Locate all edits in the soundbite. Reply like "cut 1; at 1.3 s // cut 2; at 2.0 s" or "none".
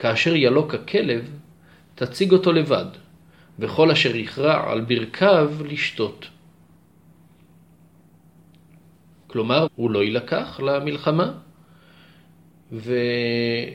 cut 1; at 9.7 s

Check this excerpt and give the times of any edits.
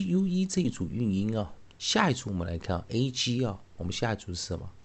cut 1; at 1.7 s

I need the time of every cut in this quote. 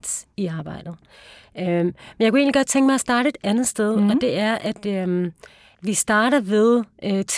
none

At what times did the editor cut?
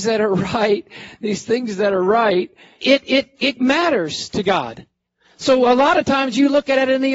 cut 1; at 2.8 s

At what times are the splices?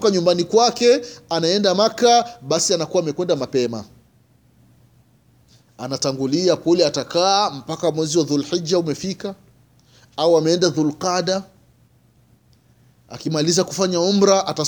none

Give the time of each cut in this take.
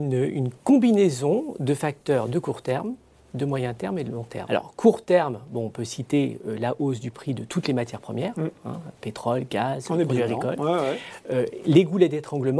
cut 1; at 4.5 s

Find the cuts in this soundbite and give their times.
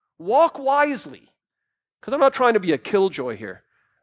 cut 1; at 1.9 s

